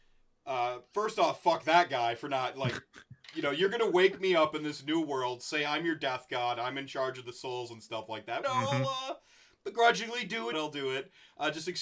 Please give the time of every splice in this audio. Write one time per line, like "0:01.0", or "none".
0:08.4
0:10.5